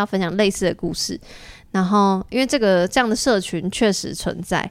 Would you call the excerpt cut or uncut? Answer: uncut